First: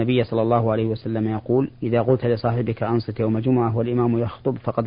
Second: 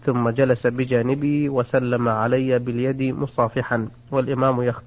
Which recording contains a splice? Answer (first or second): first